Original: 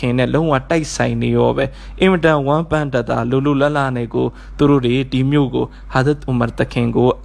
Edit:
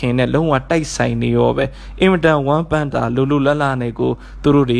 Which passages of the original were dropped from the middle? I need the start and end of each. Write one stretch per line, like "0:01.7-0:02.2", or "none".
0:02.9-0:03.1